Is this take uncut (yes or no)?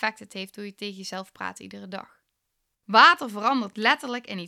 no